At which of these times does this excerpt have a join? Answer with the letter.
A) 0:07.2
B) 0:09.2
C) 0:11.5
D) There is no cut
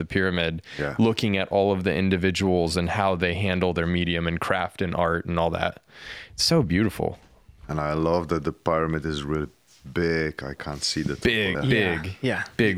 C